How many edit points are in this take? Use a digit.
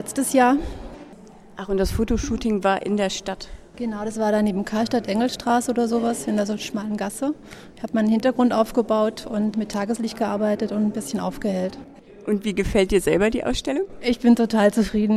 1